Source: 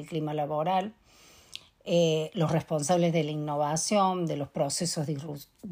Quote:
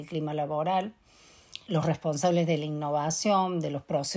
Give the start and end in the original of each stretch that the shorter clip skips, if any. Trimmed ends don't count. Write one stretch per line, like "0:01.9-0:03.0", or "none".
0:01.7-0:02.3